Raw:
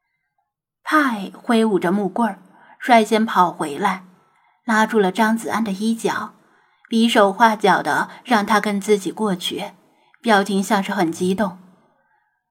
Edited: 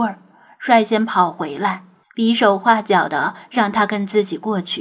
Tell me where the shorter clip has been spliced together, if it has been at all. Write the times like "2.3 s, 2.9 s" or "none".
2.0 s